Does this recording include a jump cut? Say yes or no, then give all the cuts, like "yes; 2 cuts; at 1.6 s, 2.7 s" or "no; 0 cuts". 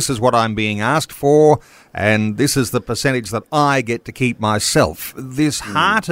no; 0 cuts